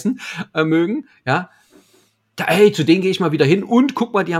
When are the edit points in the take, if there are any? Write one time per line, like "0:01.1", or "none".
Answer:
none